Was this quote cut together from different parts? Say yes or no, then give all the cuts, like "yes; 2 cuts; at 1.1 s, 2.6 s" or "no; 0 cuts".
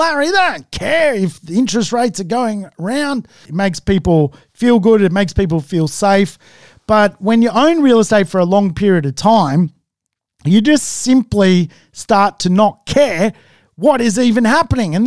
yes; 1 cut; at 3.5 s